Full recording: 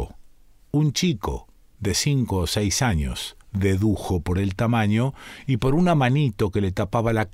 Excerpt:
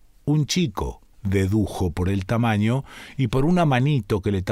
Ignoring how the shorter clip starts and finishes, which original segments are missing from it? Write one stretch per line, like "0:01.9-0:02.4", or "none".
0:01.6-0:03.4